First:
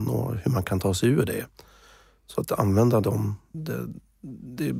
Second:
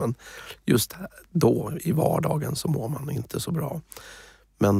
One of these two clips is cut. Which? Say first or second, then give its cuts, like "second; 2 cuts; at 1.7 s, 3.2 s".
first; 1 cut; at 3.5 s